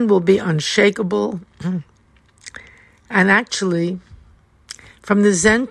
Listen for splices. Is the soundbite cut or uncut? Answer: uncut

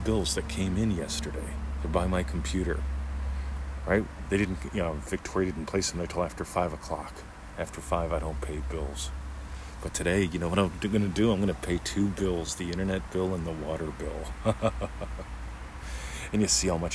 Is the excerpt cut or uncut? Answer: uncut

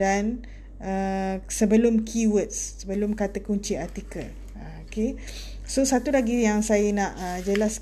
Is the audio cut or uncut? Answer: uncut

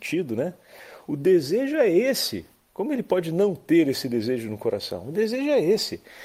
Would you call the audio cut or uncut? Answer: uncut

